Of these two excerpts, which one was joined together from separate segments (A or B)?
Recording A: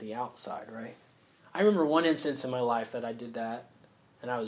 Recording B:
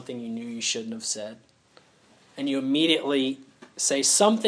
A